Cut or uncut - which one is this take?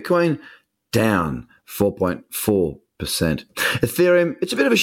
uncut